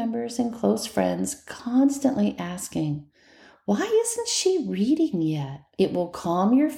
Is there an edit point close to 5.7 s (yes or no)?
yes